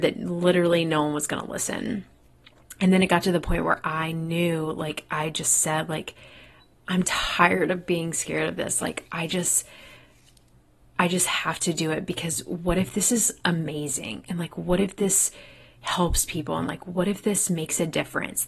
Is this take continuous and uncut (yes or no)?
yes